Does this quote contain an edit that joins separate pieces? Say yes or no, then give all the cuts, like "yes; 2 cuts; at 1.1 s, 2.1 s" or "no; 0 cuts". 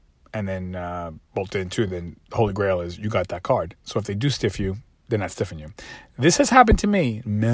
no; 0 cuts